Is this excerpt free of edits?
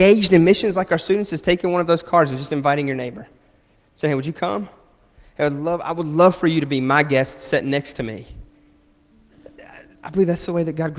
yes; 0 cuts

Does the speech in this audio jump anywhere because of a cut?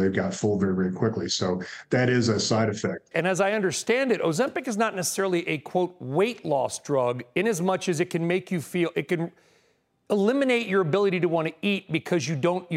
yes; 1 cut; at 3.1 s

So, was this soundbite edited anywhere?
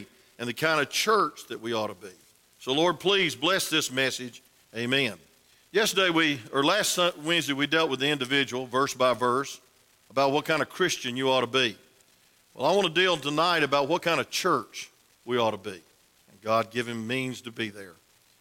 yes; 2 cuts; at 4.6 s, 16.2 s

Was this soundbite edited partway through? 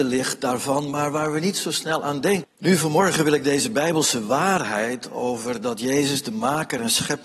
yes; 1 cut; at 2.4 s

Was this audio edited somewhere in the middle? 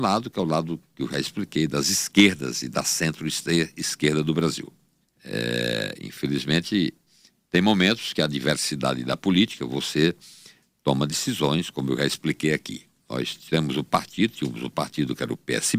yes; 1 cut; at 5.0 s

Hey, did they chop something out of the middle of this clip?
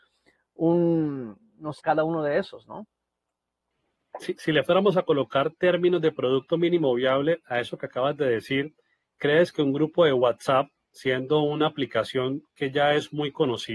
yes; 1 cut; at 1.8 s

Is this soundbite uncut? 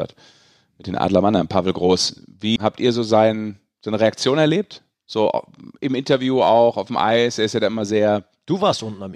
no; 1 cut; at 2.6 s

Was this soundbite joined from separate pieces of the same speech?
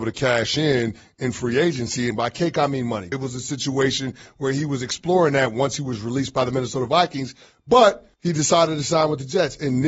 yes; 3 cuts; at 2.1 s, 3.1 s, 8.1 s

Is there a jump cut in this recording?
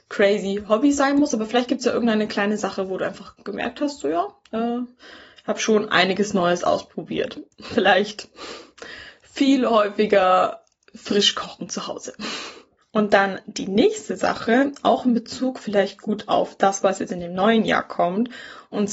no; 0 cuts

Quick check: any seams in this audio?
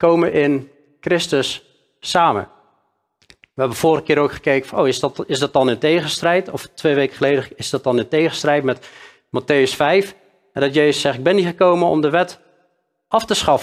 no; 0 cuts

